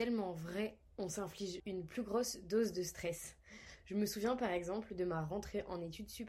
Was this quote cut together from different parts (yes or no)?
yes